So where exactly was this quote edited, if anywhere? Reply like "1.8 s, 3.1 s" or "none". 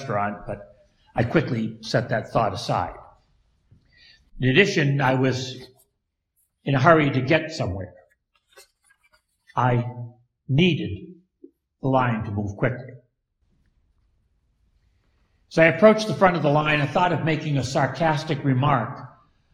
4.2 s